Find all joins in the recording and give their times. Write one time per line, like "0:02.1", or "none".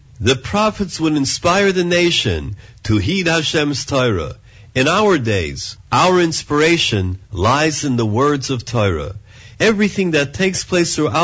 0:05.8
0:09.5